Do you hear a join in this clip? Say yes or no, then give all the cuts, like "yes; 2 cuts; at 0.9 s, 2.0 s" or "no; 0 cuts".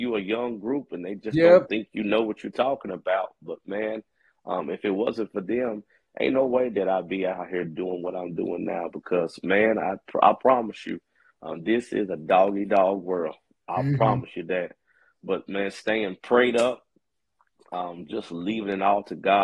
no; 0 cuts